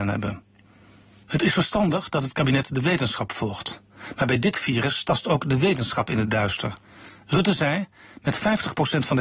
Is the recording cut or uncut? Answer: uncut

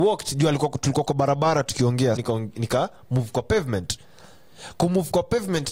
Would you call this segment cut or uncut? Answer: cut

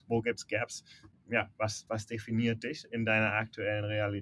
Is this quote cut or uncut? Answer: cut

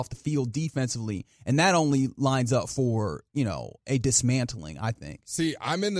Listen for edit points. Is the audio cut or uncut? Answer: uncut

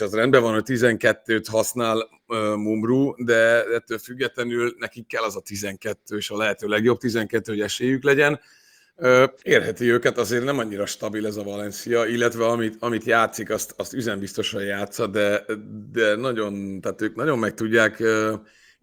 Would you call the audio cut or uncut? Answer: cut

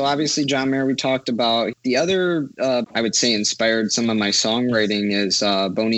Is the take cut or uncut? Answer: cut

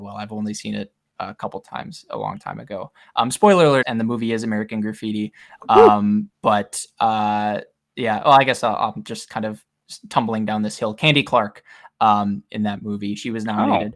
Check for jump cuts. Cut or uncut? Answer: cut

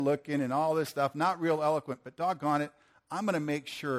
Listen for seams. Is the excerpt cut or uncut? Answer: uncut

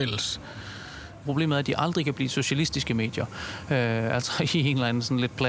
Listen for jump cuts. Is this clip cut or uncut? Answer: cut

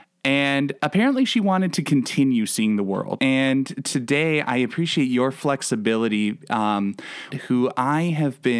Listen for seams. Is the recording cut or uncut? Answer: cut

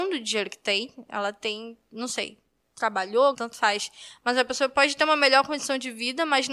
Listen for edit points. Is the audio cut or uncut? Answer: cut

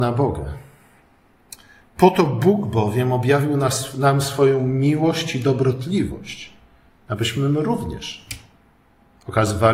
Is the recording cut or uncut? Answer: uncut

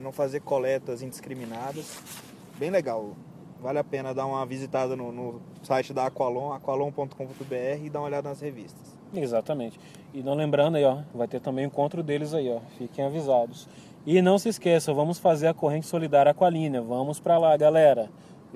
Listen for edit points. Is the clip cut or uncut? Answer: uncut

